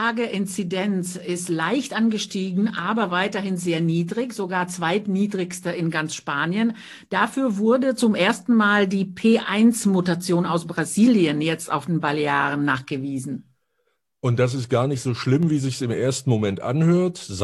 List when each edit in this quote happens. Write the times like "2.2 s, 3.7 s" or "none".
none